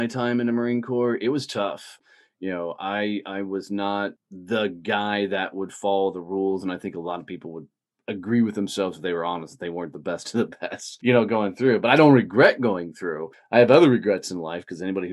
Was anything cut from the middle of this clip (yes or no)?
yes